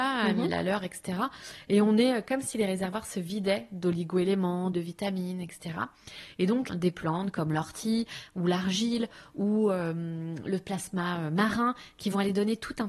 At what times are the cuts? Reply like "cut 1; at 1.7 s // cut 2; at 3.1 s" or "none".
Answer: cut 1; at 4.7 s // cut 2; at 6.7 s